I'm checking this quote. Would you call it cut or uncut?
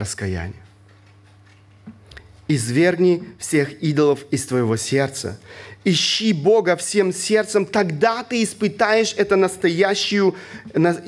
uncut